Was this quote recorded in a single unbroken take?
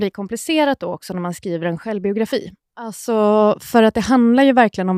yes; 0 cuts

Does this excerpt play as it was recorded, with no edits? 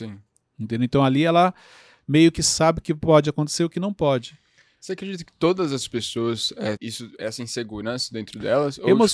no; 1 cut; at 6.8 s

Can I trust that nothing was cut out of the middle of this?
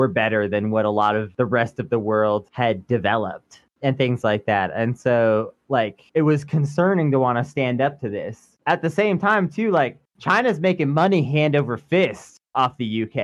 yes; 0 cuts

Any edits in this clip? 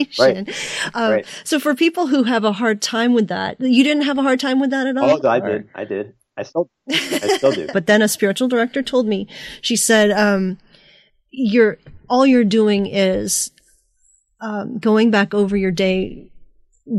yes; 1 cut; at 7.7 s

